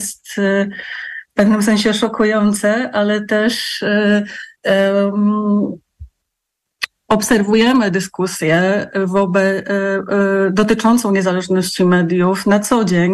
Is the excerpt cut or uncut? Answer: cut